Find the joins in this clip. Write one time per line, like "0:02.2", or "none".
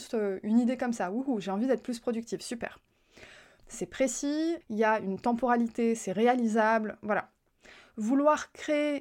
0:03.6
0:04.6

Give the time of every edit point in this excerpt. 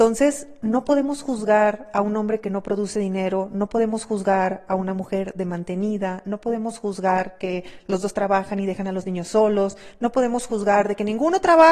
none

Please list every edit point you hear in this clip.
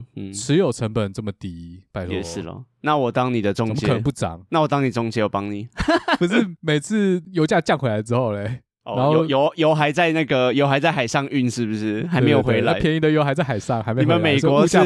0:06.2

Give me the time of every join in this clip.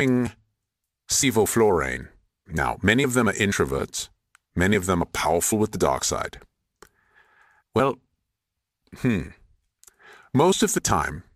0:02.5
0:07.6

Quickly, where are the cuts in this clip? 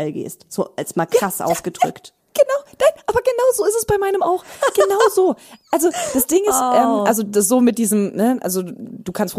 none

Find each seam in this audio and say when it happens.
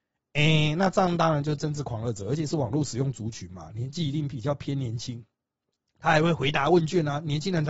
none

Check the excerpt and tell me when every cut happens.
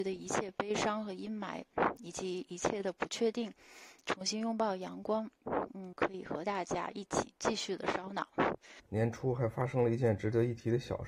0:05.9
0:08.8

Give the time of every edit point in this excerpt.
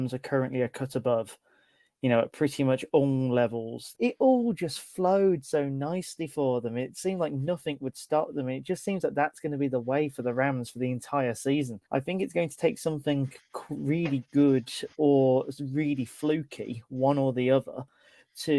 0:03.9
0:11.8

